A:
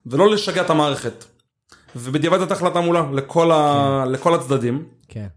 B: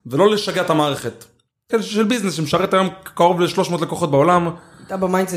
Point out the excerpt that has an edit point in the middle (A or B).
B